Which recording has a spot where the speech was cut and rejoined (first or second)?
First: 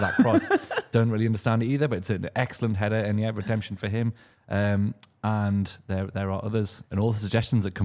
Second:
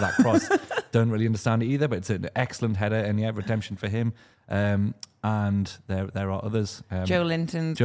first